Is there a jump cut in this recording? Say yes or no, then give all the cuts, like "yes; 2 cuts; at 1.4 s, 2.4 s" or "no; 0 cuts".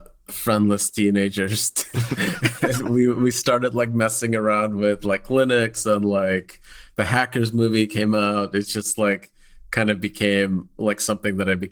no; 0 cuts